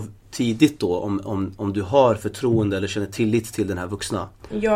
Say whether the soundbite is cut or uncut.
uncut